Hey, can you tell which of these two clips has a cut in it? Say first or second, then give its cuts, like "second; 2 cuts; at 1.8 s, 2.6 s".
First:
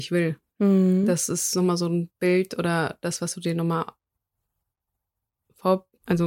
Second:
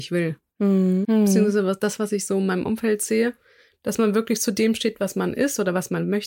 second; 1 cut; at 1.0 s